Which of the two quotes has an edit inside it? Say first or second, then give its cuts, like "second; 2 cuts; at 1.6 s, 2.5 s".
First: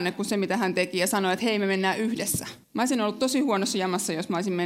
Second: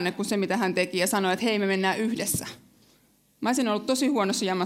first; 1 cut; at 2.6 s